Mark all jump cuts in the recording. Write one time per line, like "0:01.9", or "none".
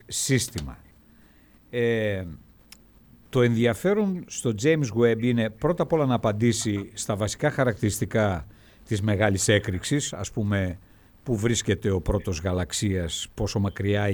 none